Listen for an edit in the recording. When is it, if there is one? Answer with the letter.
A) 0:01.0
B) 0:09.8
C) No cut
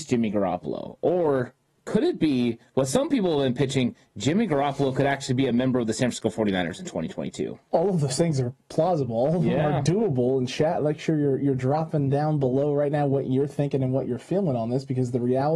C